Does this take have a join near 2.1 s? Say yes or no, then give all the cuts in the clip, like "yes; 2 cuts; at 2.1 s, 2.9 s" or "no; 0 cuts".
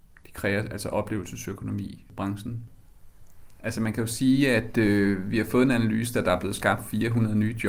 no; 2 cuts; at 3.6 s, 6.1 s